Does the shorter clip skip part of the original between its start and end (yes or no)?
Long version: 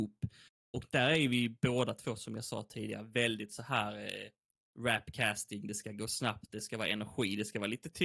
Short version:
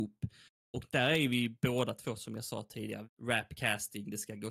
yes